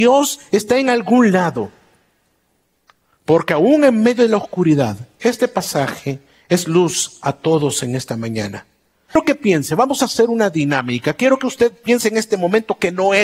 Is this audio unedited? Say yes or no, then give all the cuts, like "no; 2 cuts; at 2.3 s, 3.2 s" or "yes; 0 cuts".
no; 1 cut; at 9.1 s